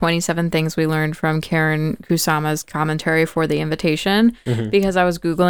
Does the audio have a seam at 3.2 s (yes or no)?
no